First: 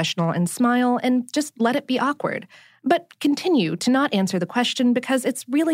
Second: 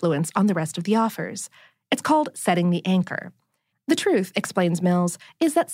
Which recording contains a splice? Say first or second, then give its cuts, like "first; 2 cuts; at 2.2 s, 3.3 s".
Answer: second; 1 cut; at 3.7 s